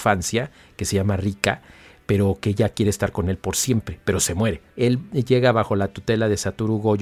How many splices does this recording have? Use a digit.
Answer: 1